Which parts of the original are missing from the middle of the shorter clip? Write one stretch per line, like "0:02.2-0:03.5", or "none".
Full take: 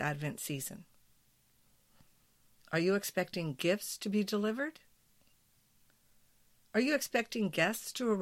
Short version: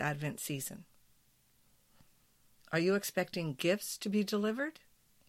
none